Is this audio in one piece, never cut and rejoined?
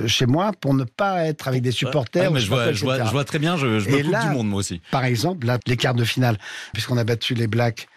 no; 2 cuts; at 5.6 s, 6.7 s

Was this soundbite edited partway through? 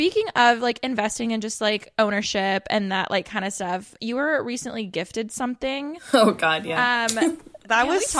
no; 0 cuts

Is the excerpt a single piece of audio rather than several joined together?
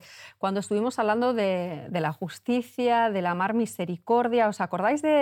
yes; 0 cuts

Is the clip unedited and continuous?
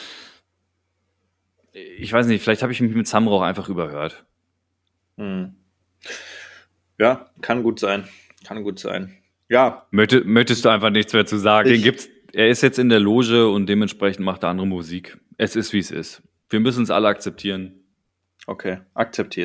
no; 2 cuts; at 7.4 s, 11.6 s

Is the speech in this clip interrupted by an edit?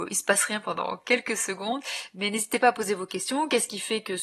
no; 0 cuts

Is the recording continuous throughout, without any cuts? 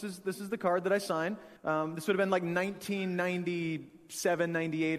no; 1 cut; at 1.6 s

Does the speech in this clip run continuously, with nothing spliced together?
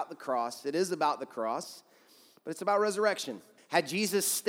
no; 1 cut; at 3.6 s

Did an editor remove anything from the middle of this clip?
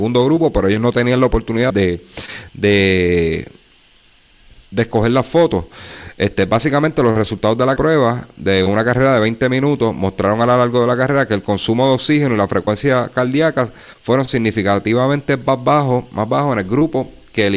yes; 2 cuts; at 1.7 s, 7.8 s

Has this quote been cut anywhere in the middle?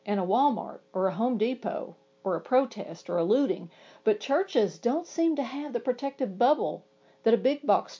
no; 0 cuts

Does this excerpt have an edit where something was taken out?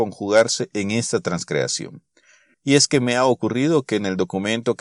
yes; 1 cut; at 2.5 s

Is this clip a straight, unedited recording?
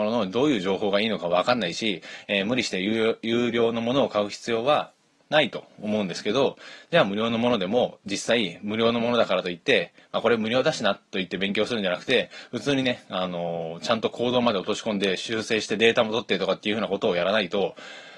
yes; 0 cuts

